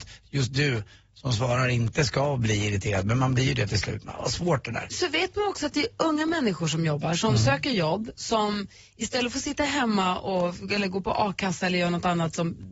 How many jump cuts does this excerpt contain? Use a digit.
0